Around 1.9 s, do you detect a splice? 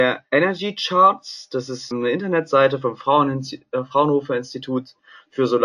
yes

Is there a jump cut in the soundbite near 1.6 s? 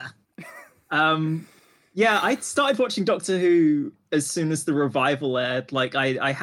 no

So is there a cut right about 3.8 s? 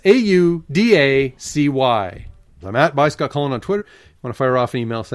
yes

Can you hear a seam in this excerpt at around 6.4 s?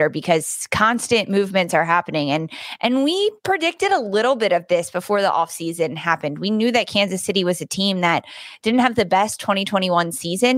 no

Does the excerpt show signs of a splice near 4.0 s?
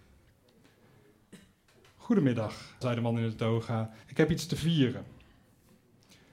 yes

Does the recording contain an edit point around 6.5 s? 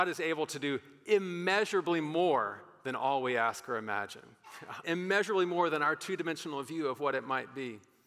no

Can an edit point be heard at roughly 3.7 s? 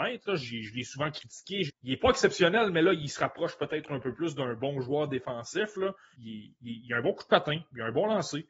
no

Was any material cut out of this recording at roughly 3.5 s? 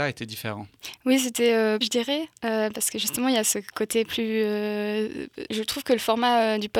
no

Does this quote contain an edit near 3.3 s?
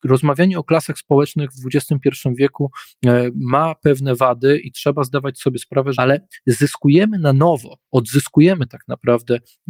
no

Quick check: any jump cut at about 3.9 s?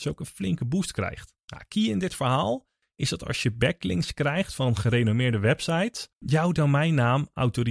no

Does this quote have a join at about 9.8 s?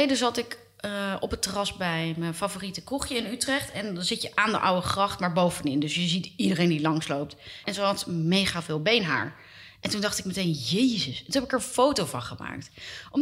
no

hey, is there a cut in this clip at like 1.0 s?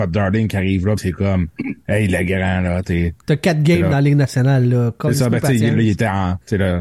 no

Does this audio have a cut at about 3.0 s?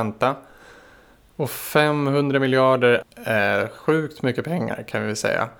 yes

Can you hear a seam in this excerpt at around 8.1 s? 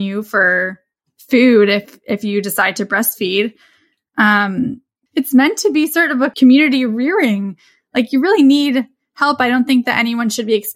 no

